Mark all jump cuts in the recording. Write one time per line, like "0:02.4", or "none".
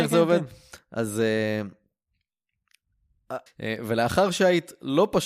0:03.5